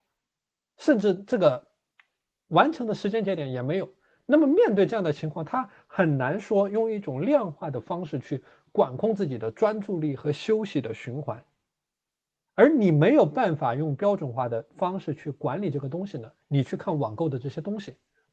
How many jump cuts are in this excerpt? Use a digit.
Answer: 1